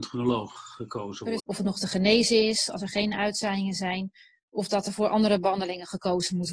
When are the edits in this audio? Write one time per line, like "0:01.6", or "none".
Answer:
0:01.4